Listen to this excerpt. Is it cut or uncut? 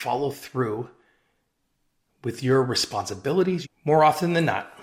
cut